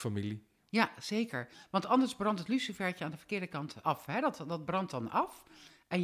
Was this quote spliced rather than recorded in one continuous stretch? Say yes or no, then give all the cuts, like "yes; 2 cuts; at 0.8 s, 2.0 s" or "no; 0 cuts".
yes; 1 cut; at 3.8 s